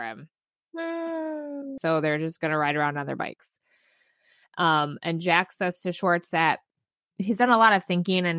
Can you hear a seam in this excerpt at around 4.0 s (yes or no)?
no